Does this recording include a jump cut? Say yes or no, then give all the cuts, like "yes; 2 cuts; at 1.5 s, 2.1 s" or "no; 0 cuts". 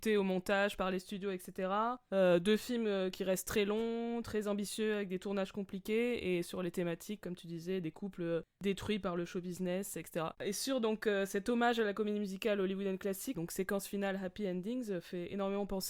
yes; 2 cuts; at 10.3 s, 13.3 s